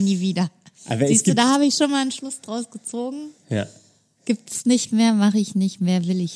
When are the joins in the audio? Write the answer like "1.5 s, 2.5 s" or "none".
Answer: none